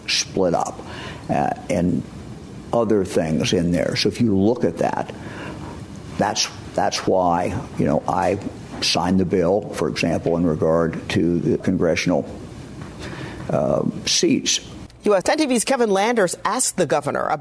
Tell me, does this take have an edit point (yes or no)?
yes